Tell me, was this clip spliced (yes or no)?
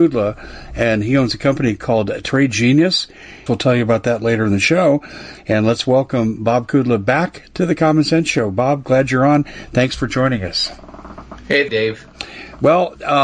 yes